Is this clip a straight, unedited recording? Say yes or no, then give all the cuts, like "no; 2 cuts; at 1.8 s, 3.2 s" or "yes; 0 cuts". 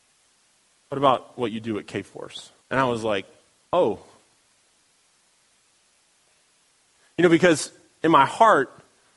no; 1 cut; at 2.6 s